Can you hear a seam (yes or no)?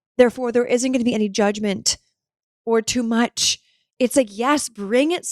no